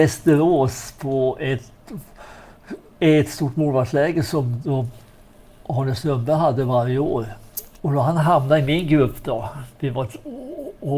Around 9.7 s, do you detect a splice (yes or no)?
no